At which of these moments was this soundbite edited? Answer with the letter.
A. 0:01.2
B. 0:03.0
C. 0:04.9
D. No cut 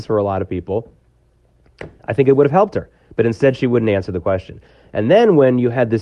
D